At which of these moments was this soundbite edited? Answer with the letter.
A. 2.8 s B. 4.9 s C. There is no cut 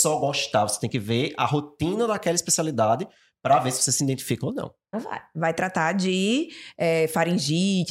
B